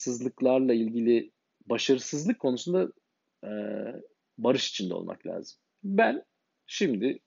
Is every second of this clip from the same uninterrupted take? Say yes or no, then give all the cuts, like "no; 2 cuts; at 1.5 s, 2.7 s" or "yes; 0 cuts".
yes; 0 cuts